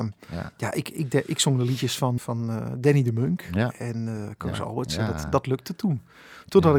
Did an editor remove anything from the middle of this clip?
yes; 1 cut; at 2.2 s

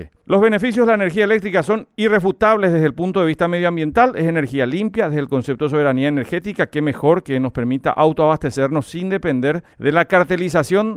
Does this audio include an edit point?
no; 0 cuts

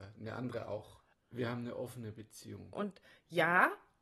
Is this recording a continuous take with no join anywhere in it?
no; 2 cuts; at 1.1 s, 2.7 s

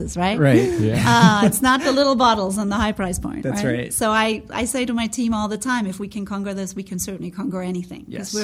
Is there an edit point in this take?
no; 0 cuts

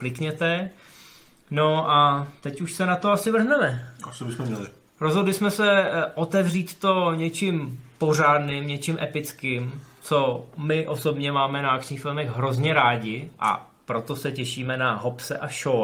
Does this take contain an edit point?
no; 0 cuts

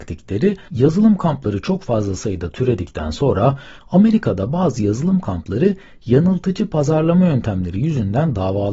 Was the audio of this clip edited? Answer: no; 0 cuts

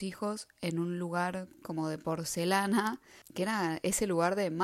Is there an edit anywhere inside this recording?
yes; 1 cut; at 3.2 s

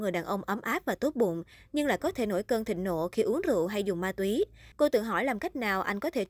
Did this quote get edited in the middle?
yes; 1 cut; at 4.7 s

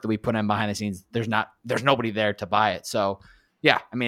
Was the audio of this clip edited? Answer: no; 0 cuts

